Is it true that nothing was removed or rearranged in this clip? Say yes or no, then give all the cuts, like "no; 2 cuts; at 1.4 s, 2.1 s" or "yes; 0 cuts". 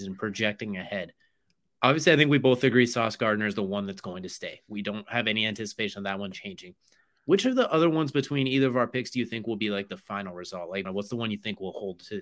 no; 1 cut; at 10.9 s